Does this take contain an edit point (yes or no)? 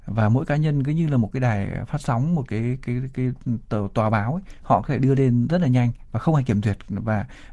no